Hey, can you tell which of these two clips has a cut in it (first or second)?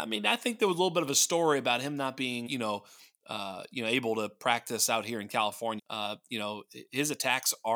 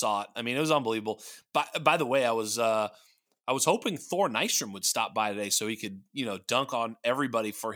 first